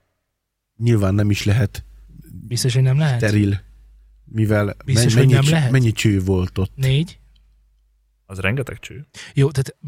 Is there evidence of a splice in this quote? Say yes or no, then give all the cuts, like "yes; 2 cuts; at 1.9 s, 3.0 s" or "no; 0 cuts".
no; 0 cuts